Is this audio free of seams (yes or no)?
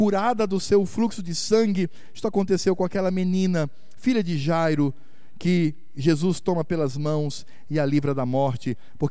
yes